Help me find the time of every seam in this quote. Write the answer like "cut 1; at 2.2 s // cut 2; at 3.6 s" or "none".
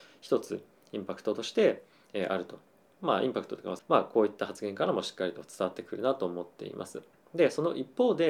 cut 1; at 3.8 s